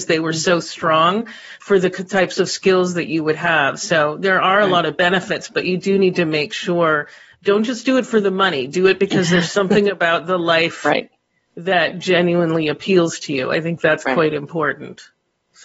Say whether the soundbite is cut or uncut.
cut